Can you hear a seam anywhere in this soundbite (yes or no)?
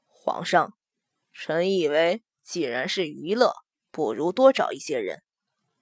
no